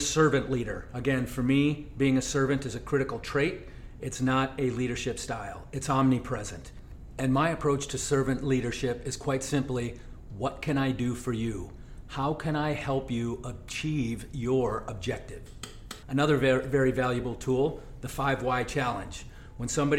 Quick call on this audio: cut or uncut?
cut